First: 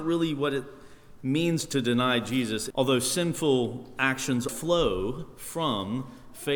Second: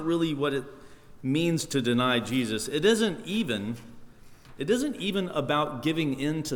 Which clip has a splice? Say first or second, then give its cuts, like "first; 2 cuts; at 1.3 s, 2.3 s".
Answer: first; 2 cuts; at 2.7 s, 4.5 s